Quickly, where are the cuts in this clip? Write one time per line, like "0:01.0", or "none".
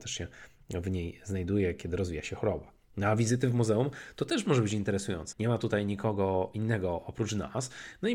0:05.3